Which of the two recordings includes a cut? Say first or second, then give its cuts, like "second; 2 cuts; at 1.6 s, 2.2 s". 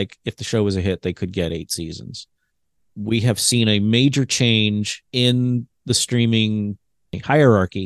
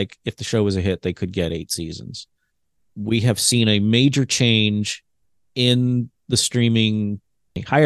first; 1 cut; at 5.1 s